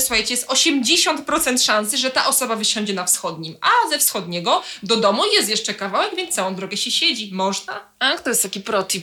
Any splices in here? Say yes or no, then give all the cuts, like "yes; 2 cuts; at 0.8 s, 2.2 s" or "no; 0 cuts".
no; 0 cuts